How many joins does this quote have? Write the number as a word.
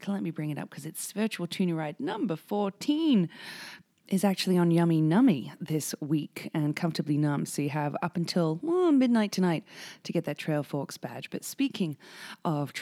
zero